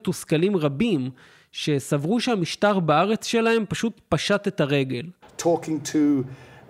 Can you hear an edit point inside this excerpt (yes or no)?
yes